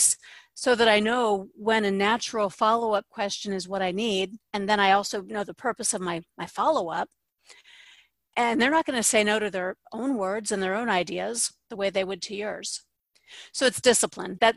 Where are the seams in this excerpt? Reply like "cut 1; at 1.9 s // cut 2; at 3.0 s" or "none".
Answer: cut 1; at 8.3 s // cut 2; at 9.8 s